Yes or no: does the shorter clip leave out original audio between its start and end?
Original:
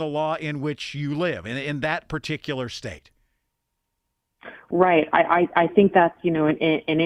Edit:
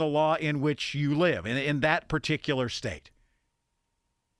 no